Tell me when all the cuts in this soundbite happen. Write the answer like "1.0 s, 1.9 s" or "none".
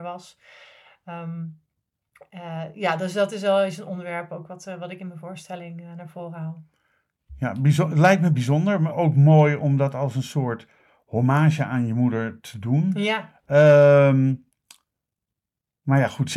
8.9 s